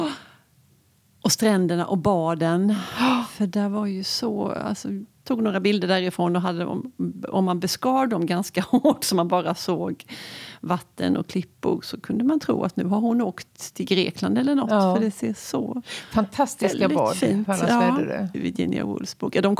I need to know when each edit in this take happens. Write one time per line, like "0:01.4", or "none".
0:05.1
0:18.3